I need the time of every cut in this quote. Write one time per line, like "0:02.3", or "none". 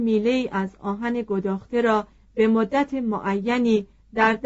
none